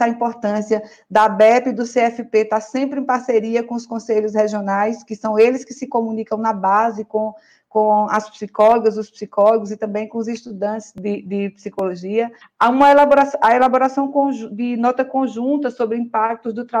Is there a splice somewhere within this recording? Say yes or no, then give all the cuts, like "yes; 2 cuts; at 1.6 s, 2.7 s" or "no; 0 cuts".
yes; 1 cut; at 12.4 s